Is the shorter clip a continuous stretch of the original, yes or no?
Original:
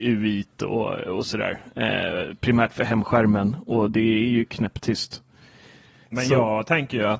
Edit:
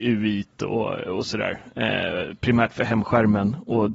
yes